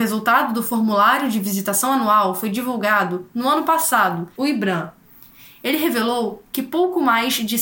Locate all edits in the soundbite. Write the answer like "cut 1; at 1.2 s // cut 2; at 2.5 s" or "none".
cut 1; at 4.4 s

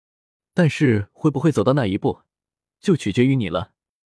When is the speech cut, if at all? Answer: none

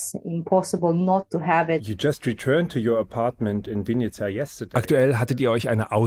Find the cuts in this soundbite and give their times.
none

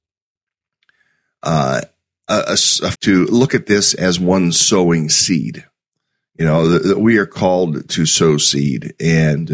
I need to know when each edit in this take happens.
cut 1; at 2.9 s

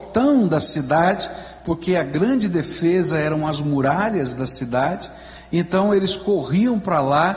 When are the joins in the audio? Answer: none

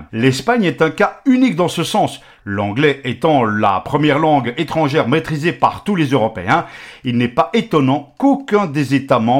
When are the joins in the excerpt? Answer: cut 1; at 2.4 s

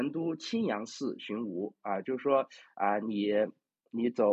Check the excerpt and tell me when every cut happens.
none

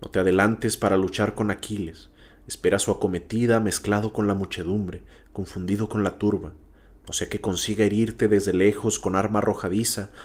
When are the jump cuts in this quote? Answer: none

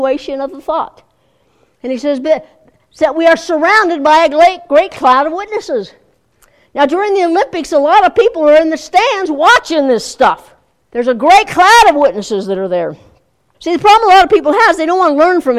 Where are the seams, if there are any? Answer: cut 1; at 10.8 s // cut 2; at 13.5 s

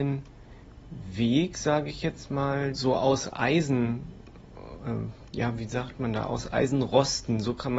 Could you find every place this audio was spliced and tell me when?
cut 1; at 2.7 s

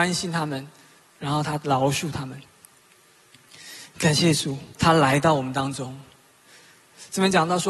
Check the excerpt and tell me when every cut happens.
cut 1; at 1.0 s // cut 2; at 4.8 s

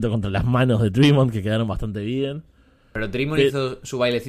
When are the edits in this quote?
none

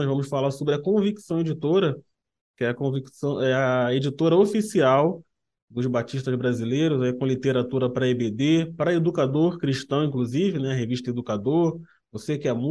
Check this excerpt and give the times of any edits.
none

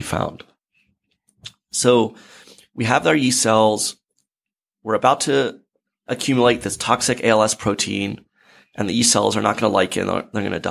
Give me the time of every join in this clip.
none

